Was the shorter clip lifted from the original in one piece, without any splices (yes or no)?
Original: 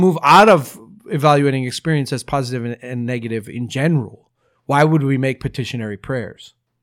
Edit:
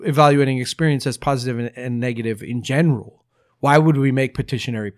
yes